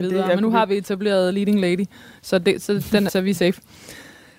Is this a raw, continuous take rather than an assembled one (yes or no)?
no